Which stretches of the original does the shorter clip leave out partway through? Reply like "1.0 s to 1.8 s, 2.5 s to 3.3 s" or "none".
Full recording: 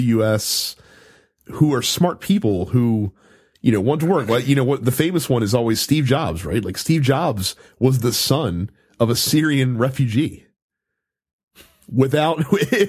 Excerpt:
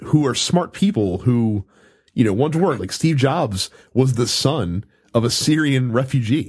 4.3 s to 6.6 s